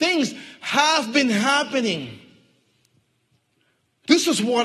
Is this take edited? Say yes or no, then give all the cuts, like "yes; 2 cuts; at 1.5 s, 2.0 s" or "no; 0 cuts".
no; 0 cuts